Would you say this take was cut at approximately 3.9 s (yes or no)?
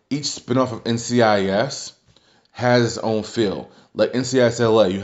no